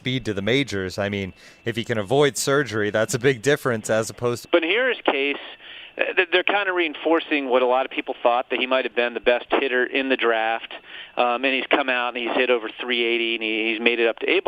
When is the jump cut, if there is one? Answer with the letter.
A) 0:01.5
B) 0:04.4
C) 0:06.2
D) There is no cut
B